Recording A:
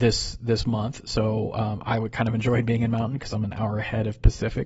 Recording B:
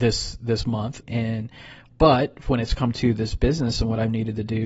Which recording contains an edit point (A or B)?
B